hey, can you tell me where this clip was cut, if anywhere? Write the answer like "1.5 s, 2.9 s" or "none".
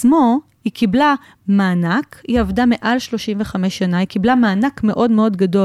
none